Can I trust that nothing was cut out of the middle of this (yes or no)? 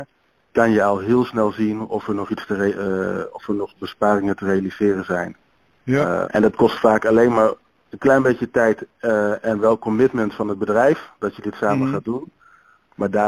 no